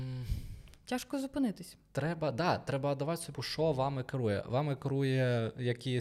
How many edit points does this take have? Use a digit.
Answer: 1